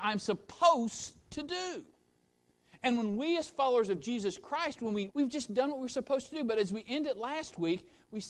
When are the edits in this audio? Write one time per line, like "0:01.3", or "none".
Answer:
0:05.1